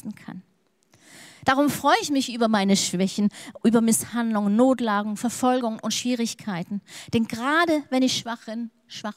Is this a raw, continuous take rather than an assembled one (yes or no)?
yes